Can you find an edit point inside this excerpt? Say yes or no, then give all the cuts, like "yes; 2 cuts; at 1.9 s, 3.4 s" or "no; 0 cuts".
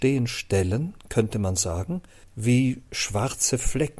yes; 1 cut; at 2.2 s